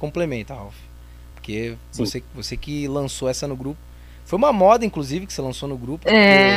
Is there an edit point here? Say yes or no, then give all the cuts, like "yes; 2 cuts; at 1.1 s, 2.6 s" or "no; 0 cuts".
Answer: no; 0 cuts